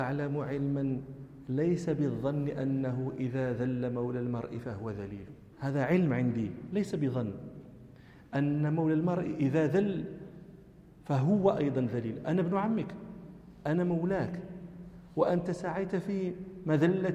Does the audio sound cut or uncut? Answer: cut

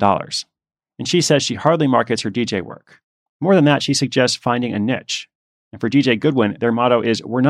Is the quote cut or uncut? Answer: cut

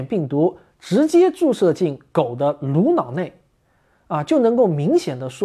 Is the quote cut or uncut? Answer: uncut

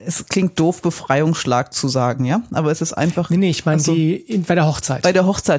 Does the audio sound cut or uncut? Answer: uncut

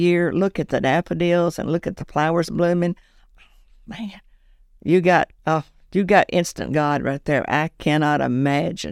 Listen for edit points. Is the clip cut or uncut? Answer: cut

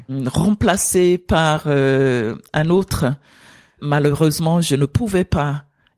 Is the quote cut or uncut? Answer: uncut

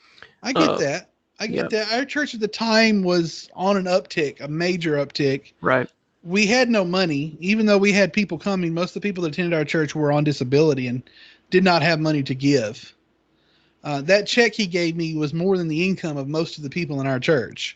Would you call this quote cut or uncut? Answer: uncut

